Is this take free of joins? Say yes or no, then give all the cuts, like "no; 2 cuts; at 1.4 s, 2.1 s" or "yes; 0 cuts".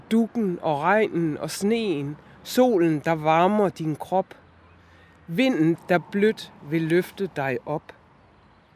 no; 1 cut; at 5.7 s